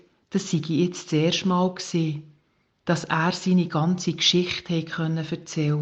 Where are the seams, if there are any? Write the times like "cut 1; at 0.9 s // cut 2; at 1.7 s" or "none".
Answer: none